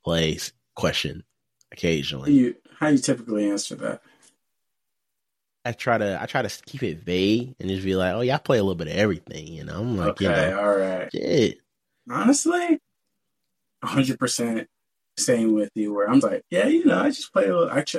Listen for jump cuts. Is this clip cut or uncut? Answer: cut